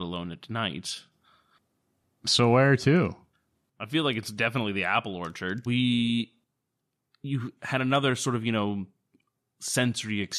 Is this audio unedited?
no; 1 cut; at 5.7 s

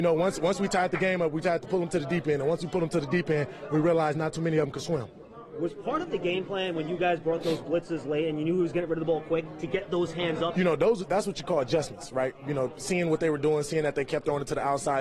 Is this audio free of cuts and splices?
no; 1 cut; at 10.5 s

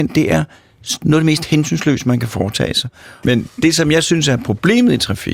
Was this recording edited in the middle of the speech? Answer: yes; 1 cut; at 3.2 s

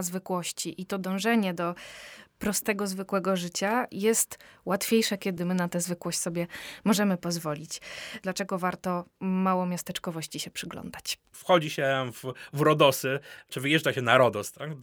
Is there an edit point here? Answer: yes; 2 cuts; at 8.2 s, 11.3 s

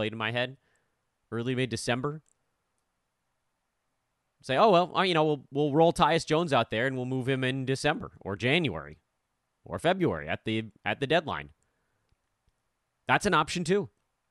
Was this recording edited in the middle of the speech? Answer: no; 0 cuts

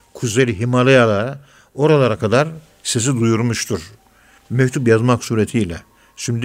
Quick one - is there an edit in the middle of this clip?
no; 0 cuts

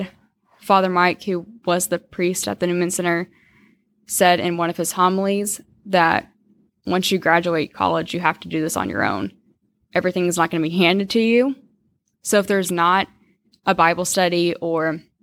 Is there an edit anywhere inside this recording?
no; 0 cuts

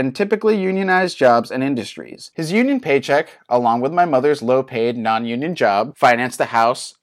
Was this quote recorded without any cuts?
no; 1 cut; at 2.3 s

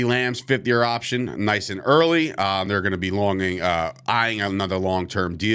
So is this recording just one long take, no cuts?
yes; 0 cuts

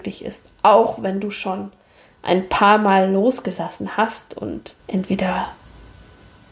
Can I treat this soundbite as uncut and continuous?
no; 1 cut; at 4.8 s

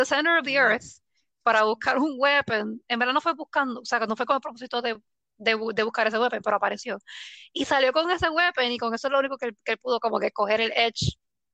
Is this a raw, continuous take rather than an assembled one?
yes; 0 cuts

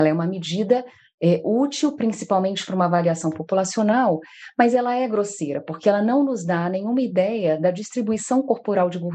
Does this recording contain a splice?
no; 0 cuts

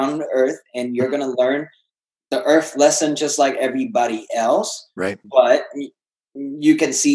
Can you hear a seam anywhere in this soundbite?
no; 0 cuts

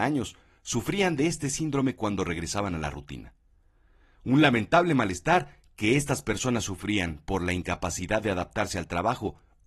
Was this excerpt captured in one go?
yes; 0 cuts

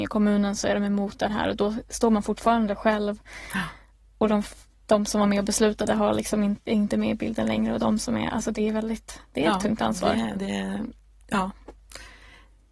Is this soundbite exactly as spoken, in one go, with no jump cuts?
yes; 0 cuts

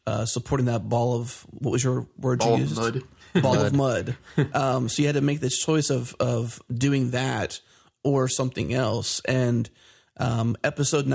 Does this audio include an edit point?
no; 0 cuts

